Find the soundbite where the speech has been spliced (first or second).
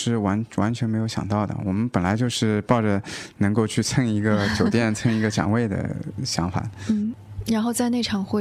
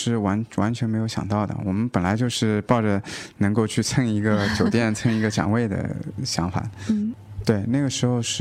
second